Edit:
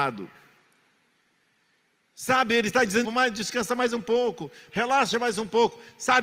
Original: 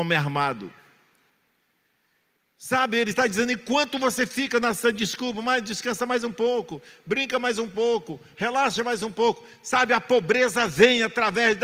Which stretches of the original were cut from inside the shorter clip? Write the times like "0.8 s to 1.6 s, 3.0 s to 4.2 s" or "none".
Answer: 3.5 s to 5.3 s, 7.0 s to 8.3 s